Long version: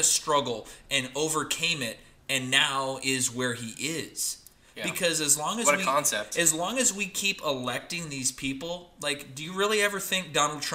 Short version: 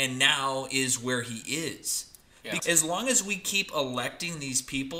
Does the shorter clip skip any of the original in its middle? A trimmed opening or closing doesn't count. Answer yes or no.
yes